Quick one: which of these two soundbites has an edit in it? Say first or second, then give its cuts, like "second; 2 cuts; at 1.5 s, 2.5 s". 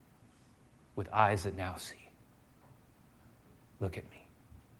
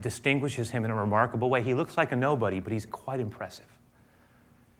second; 1 cut; at 2.9 s